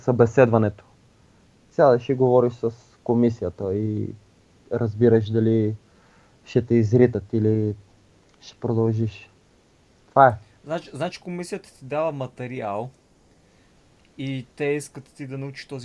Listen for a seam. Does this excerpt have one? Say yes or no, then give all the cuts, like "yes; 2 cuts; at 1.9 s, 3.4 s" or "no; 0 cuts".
no; 0 cuts